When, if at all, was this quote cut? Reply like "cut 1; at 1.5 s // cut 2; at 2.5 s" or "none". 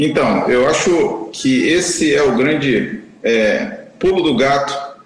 none